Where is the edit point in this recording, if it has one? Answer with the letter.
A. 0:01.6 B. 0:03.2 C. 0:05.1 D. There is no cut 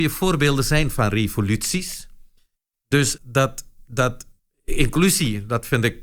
B